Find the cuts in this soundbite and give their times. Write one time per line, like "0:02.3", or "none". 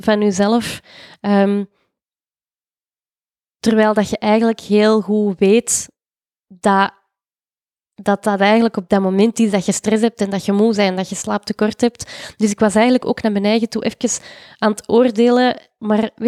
none